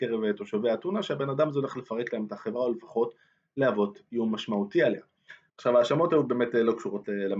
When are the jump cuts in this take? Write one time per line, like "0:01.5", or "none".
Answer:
0:05.5